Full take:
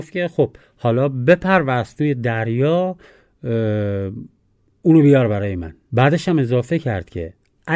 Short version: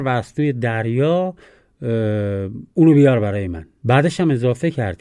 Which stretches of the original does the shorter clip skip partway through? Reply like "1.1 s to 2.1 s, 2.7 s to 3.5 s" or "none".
4.3 s to 4.8 s

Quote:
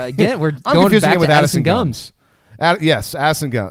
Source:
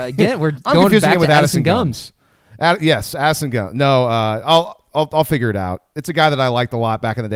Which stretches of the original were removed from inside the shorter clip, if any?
none

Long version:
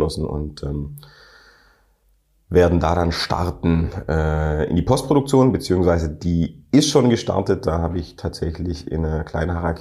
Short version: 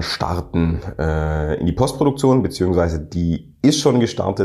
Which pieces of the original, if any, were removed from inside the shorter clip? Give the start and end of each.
none

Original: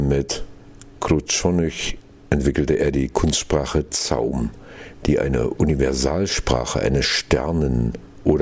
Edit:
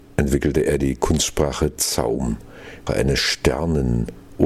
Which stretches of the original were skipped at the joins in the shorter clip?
5.0 s to 6.7 s

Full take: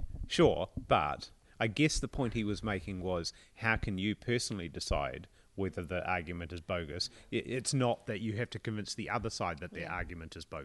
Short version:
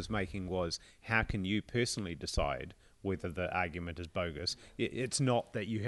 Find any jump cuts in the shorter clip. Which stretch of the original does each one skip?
none

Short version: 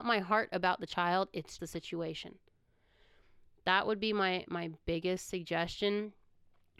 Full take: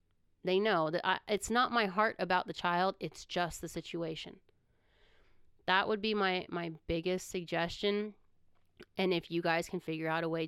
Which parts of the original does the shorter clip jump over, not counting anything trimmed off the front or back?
3.3 s to 3.6 s

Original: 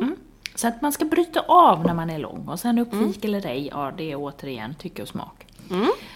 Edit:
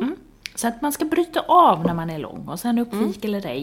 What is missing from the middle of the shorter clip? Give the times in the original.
none

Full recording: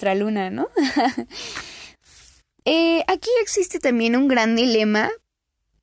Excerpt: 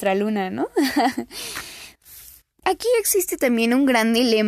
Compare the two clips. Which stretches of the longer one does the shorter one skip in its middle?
2.6 s to 3.1 s

